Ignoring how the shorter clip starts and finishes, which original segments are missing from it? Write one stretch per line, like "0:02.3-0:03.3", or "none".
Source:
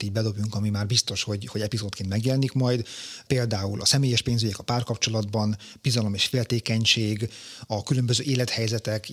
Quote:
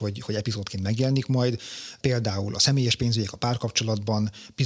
none